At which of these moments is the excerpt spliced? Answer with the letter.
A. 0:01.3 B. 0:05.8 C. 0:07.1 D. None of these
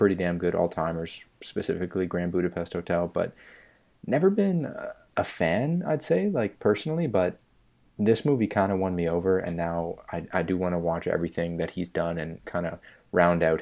D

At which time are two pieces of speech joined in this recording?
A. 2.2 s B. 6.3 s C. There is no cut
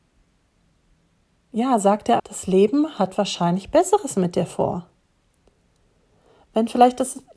A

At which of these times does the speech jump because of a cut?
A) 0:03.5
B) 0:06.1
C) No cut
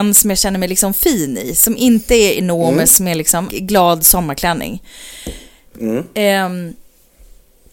A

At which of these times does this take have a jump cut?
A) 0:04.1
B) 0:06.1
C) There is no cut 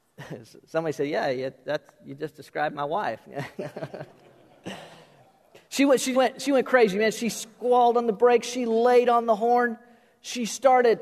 B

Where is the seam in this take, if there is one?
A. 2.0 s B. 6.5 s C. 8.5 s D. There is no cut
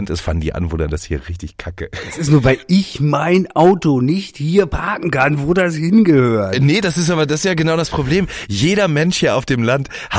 D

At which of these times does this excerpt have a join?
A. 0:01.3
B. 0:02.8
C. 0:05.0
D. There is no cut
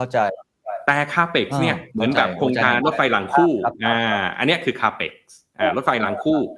B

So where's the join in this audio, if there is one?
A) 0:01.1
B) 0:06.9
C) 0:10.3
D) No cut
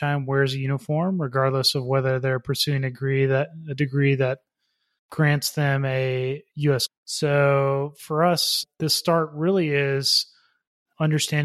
B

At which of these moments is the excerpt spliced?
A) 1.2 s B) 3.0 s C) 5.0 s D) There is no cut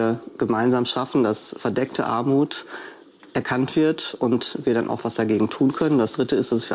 D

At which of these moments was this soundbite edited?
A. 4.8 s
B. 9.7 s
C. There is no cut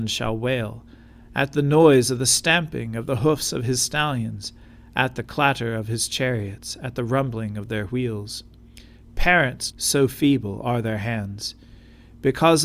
B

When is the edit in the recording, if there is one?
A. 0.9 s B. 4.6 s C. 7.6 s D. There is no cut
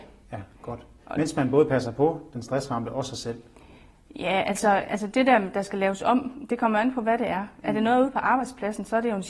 D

